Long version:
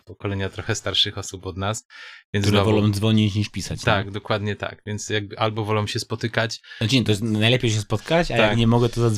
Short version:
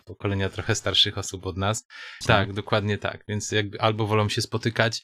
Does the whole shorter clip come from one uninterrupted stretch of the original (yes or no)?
no